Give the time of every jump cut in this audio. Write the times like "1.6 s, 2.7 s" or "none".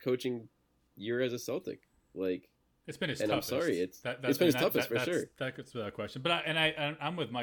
none